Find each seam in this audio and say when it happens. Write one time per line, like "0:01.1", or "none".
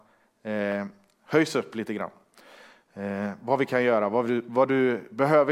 none